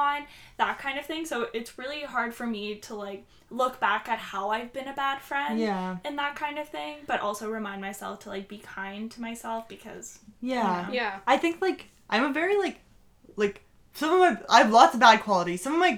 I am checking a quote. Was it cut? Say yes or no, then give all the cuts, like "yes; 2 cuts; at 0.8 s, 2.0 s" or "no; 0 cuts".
no; 0 cuts